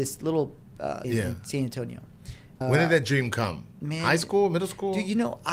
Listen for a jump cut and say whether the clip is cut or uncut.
cut